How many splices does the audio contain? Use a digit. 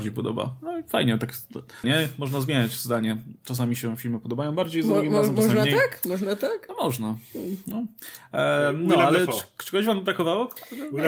1